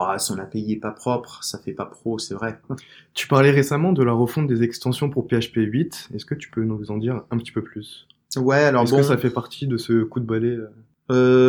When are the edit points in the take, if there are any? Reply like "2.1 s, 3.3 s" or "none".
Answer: 2.6 s